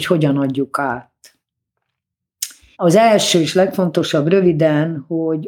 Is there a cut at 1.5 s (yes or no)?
no